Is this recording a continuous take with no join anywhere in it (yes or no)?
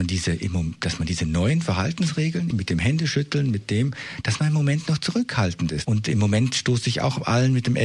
no